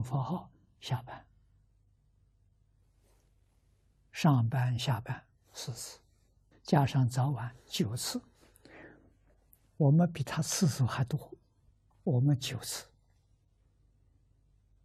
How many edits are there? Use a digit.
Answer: 2